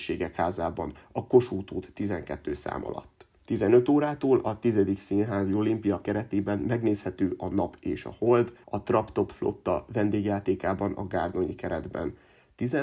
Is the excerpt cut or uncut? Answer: cut